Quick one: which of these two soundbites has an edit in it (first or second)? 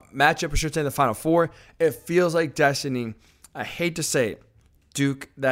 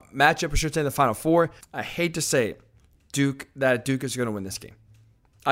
second